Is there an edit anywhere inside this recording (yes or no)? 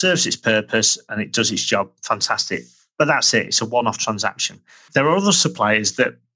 no